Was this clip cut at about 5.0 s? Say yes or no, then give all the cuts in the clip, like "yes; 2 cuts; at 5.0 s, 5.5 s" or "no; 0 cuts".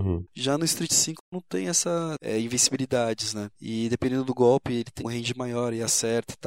yes; 2 cuts; at 3.5 s, 5.0 s